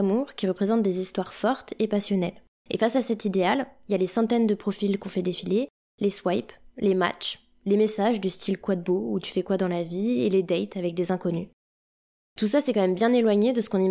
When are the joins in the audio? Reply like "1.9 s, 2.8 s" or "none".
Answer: 2.6 s